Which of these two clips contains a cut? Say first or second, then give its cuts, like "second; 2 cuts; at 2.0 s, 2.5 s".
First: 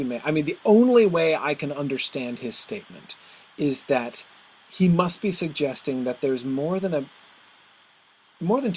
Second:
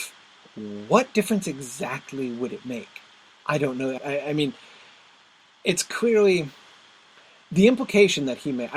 second; 1 cut; at 4.0 s